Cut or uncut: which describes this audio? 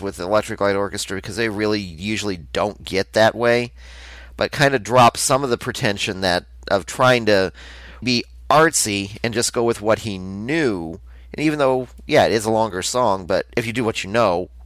cut